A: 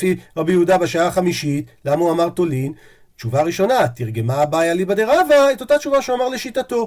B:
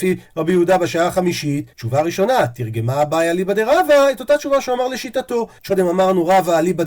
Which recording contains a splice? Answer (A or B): B